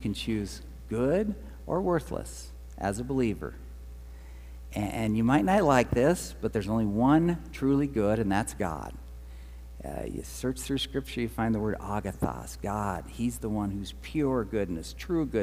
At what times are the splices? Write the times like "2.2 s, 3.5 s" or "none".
none

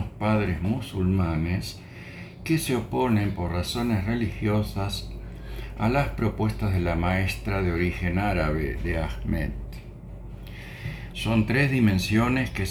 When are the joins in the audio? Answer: 11.1 s

